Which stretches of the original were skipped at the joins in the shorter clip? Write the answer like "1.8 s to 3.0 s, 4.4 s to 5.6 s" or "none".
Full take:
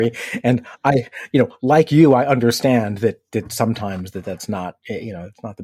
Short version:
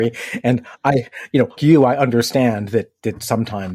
1.6 s to 1.9 s